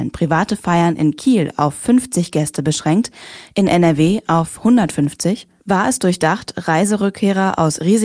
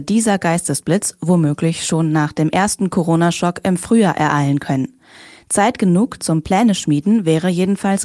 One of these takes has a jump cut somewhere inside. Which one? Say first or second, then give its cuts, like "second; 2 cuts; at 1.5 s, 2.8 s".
first; 1 cut; at 5.6 s